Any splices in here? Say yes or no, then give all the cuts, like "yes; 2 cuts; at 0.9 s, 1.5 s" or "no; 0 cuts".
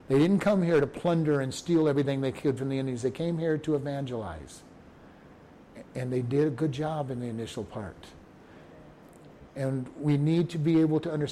no; 0 cuts